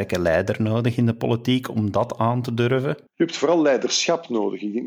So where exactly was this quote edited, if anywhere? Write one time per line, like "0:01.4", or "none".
0:03.1